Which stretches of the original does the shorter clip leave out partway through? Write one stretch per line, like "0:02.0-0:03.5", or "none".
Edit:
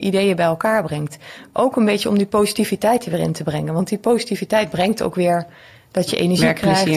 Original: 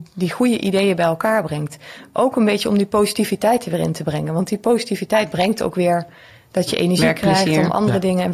none